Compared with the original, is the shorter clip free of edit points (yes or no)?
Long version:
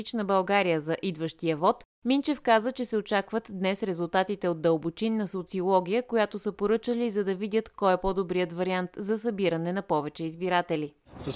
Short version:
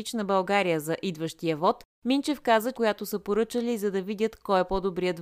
no